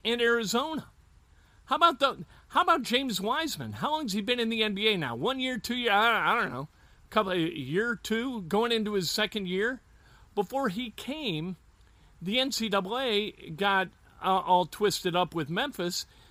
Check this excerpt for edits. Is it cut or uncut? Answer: uncut